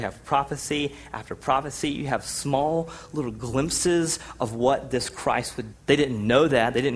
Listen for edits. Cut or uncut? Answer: cut